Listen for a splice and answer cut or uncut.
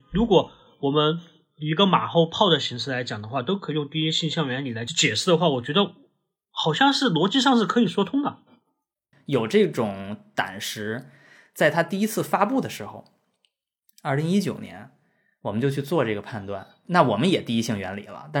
cut